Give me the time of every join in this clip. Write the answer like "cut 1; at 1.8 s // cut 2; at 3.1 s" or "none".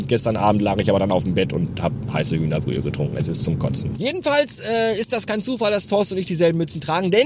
cut 1; at 3.9 s